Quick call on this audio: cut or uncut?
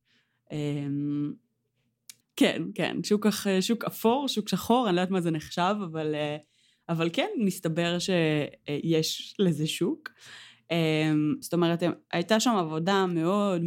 cut